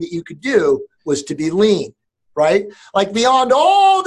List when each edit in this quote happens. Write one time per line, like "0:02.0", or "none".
0:00.9